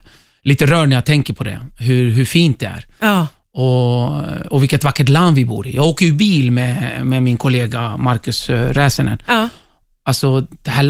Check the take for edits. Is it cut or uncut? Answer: uncut